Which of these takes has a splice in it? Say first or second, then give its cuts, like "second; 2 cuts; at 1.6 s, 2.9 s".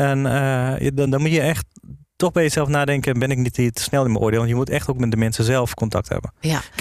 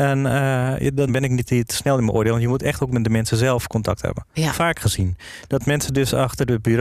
second; 2 cuts; at 1.1 s, 4.5 s